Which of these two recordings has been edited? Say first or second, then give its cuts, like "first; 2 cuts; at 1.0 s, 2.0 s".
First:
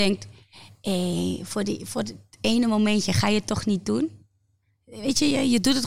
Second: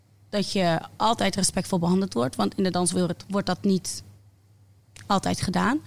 second; 1 cut; at 3.2 s